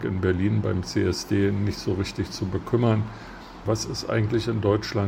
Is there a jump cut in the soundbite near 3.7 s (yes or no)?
yes